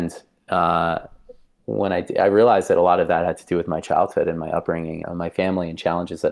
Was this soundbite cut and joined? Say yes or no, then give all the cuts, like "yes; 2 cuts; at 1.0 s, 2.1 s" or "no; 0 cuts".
yes; 1 cut; at 5.0 s